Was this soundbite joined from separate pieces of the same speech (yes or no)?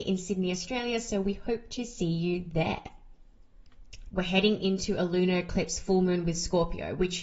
yes